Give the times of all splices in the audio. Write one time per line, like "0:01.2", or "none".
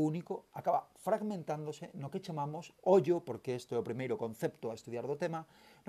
none